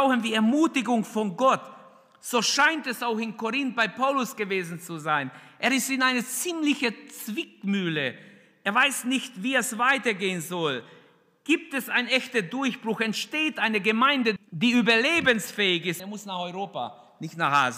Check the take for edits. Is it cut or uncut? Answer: cut